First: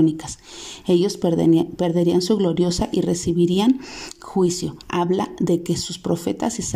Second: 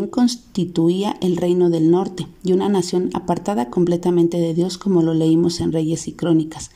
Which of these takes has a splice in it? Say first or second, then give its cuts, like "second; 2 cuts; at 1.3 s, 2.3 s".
first; 1 cut; at 4.8 s